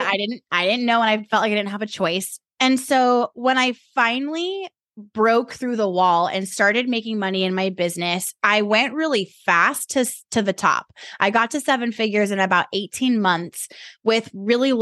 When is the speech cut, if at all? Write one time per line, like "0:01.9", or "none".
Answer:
none